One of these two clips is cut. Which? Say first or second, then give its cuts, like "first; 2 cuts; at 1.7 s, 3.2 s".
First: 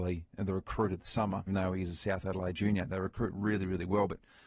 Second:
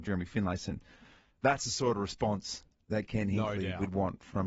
first; 1 cut; at 1.5 s